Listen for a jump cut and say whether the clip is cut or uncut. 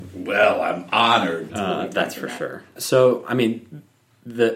cut